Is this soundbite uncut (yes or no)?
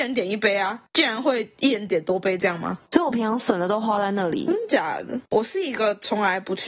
no